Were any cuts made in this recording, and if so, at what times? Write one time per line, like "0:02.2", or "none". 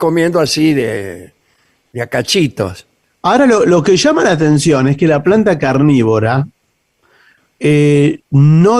none